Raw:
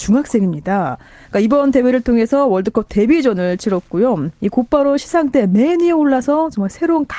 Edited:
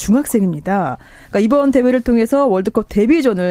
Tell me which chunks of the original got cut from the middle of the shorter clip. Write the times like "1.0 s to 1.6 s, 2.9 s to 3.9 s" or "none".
none